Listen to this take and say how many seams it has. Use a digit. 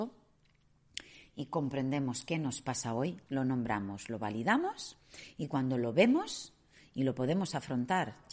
1